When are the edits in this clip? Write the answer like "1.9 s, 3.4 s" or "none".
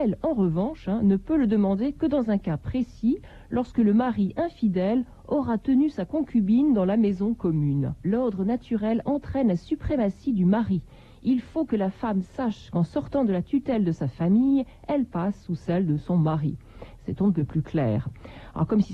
8.0 s